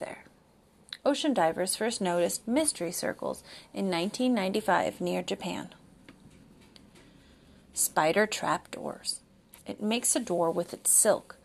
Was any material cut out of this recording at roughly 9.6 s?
yes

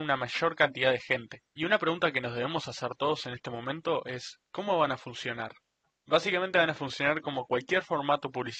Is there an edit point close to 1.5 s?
no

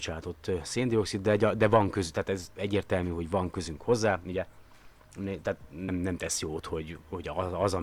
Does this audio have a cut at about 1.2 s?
no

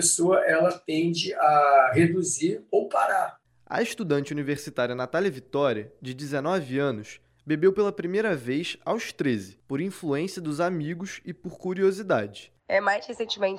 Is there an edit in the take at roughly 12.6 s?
yes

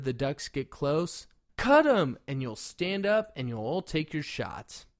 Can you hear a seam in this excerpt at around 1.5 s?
yes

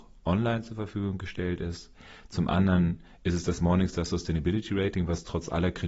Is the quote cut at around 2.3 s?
no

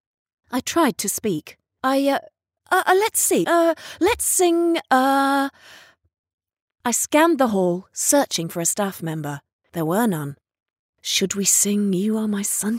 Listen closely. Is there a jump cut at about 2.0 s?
no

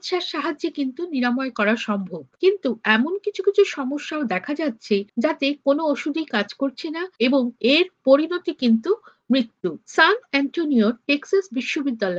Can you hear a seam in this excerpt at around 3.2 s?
no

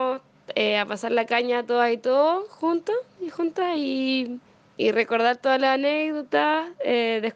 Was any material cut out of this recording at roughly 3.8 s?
no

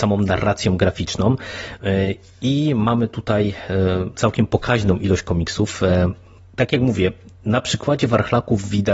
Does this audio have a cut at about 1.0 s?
no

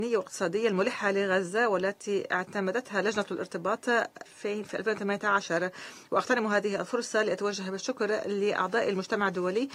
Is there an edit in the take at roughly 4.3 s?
yes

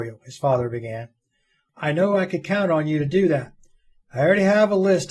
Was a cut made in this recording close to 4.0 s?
no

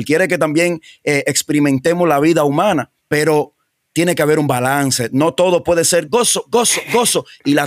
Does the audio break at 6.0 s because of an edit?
yes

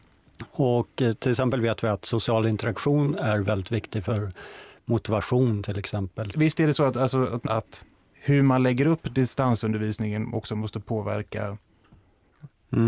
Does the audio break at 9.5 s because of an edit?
no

